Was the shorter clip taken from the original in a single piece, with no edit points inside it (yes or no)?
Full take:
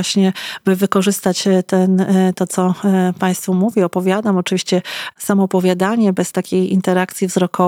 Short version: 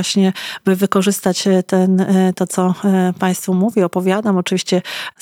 yes